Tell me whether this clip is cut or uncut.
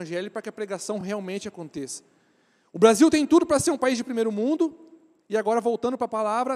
uncut